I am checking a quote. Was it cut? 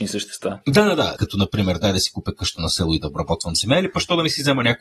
yes; 1 cut; at 1.2 s

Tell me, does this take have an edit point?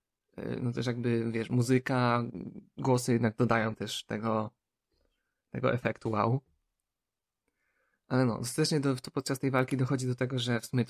no; 0 cuts

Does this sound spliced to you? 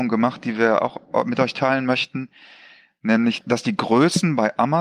yes; 1 cut; at 3.4 s

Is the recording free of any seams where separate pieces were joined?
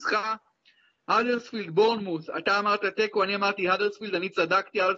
yes; 0 cuts

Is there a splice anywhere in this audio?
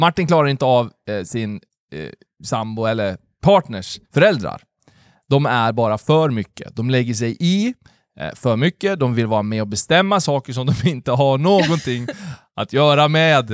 yes; 1 cut; at 4.0 s

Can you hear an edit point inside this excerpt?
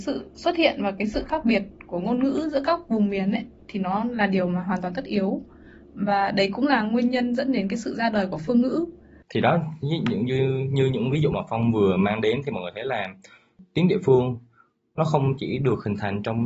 no; 0 cuts

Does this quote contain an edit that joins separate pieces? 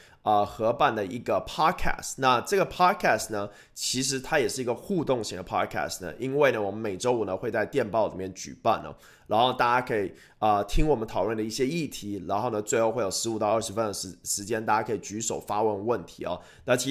no; 0 cuts

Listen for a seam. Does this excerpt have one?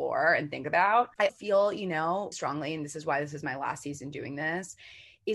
yes; 2 cuts; at 1.3 s, 2.3 s

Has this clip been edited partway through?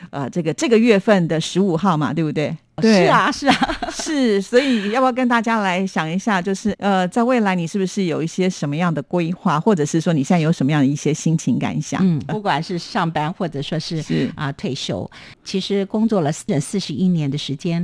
yes; 3 cuts; at 6.7 s, 12.3 s, 16.5 s

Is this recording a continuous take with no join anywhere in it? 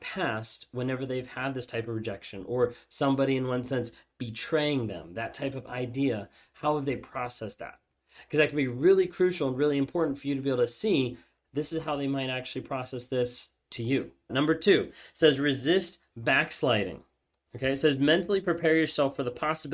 no; 1 cut; at 14.3 s

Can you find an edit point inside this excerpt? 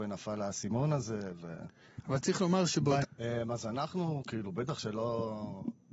yes; 1 cut; at 3.0 s

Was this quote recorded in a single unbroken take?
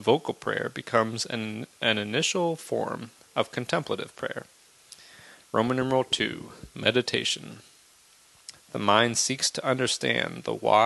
no; 1 cut; at 8.6 s

